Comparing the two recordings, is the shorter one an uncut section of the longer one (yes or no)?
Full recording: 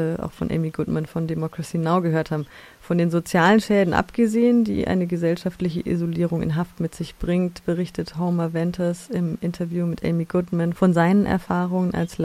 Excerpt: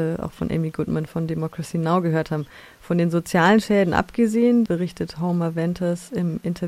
no